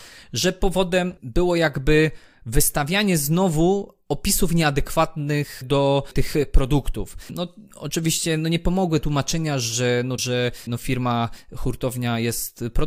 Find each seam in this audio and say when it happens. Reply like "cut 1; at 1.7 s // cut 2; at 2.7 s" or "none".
cut 1; at 10.2 s

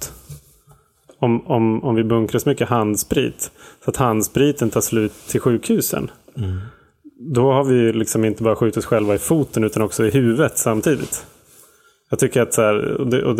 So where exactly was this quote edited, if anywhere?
none

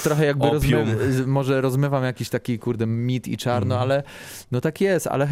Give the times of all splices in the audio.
none

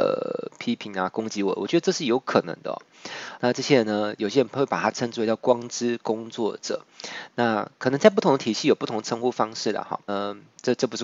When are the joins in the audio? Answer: cut 1; at 3.4 s // cut 2; at 10.1 s

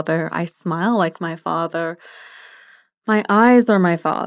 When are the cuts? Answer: none

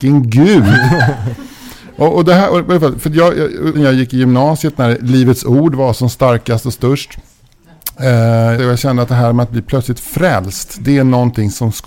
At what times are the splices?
cut 1; at 3.7 s // cut 2; at 8.6 s

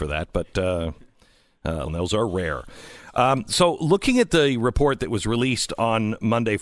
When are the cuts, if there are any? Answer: cut 1; at 1.9 s

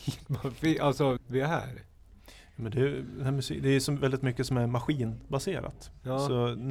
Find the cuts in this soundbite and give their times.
cut 1; at 1.2 s

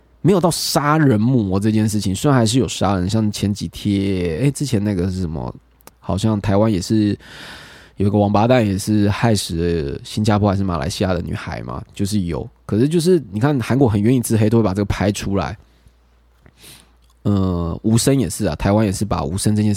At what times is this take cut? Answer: none

